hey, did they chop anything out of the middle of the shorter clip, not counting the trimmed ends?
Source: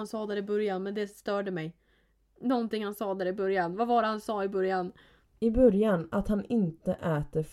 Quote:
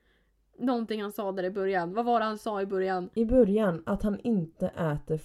yes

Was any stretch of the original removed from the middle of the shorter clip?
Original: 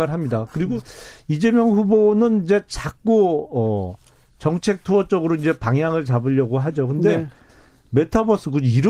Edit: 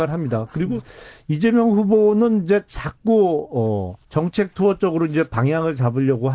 yes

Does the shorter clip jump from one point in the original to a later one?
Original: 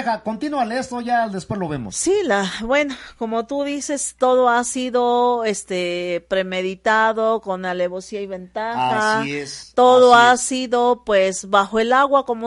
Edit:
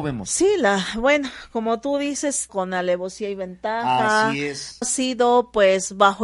yes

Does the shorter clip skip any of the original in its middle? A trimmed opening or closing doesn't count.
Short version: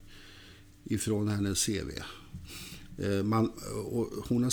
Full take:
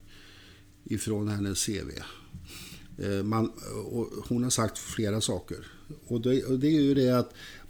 no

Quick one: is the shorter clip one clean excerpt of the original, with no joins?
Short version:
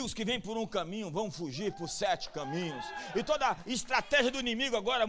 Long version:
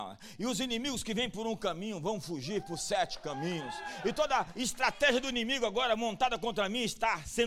yes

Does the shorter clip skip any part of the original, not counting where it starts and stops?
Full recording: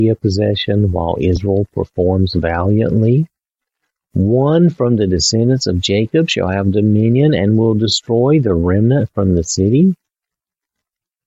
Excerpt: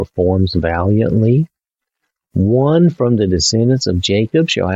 no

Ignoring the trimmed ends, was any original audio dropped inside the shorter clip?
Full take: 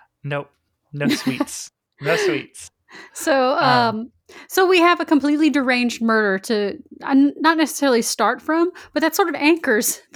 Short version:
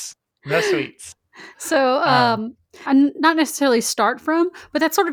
yes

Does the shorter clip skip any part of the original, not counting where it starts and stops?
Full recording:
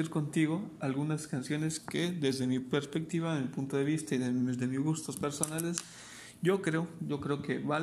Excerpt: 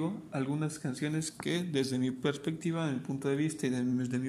no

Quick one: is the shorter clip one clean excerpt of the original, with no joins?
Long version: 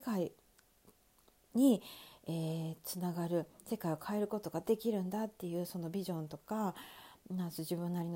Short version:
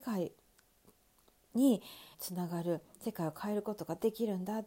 no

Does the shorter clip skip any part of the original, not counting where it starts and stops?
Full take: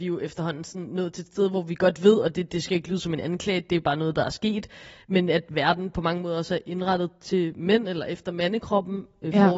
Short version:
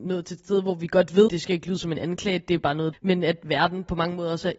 yes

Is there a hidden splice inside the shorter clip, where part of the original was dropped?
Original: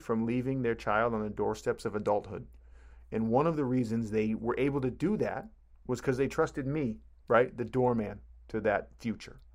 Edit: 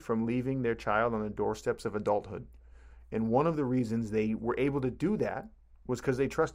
no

